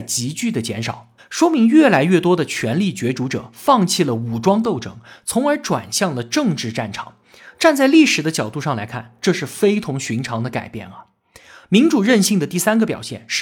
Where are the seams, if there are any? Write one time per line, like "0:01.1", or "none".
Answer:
0:01.2